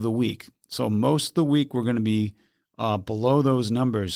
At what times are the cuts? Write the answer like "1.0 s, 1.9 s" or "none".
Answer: none

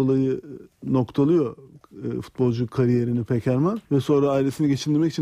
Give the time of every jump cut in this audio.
3.8 s

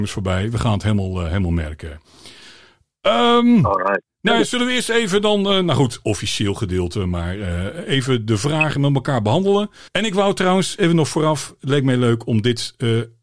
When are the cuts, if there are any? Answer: 9.9 s

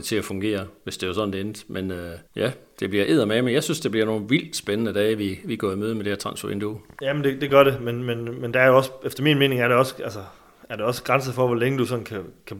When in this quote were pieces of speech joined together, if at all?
2.3 s

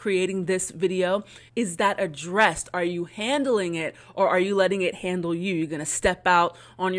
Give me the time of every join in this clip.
1.5 s

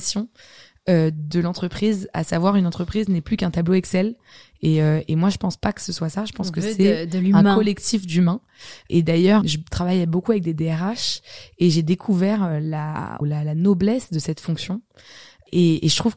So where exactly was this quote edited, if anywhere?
9.4 s, 13.2 s

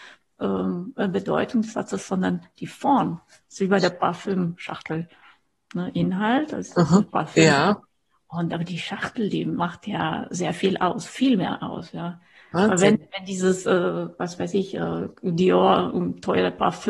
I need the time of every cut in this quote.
none

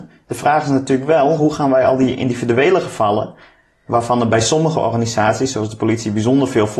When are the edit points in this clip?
none

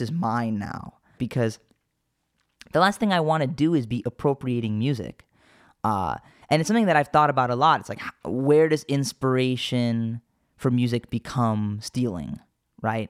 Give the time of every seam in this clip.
1.2 s

